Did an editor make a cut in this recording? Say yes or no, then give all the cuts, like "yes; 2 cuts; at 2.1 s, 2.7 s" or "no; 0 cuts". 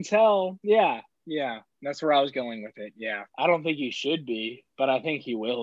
yes; 1 cut; at 3.3 s